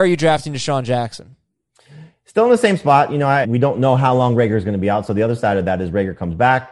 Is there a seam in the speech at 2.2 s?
no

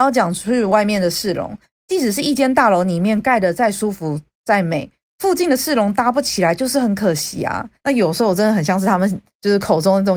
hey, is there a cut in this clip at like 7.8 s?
yes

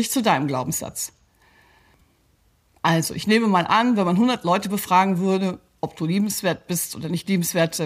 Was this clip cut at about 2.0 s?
no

